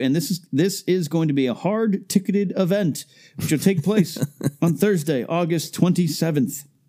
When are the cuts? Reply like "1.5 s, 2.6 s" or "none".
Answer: none